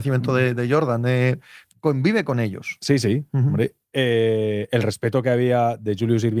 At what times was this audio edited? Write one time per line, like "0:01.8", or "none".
none